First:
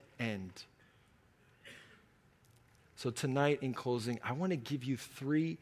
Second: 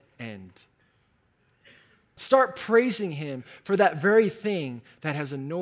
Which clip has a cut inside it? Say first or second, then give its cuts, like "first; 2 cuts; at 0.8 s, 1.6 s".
second; 1 cut; at 2.2 s